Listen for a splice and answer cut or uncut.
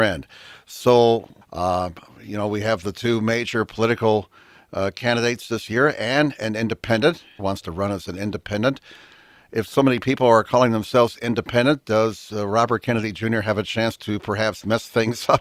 cut